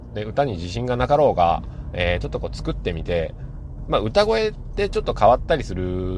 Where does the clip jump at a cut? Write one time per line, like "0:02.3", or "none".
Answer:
none